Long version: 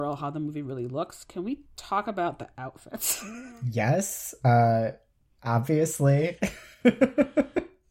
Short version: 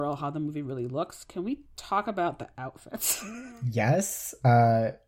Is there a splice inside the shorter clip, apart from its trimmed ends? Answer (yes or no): no